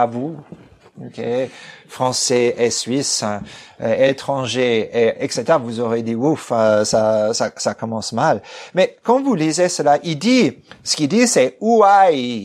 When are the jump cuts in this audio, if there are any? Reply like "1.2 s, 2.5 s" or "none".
none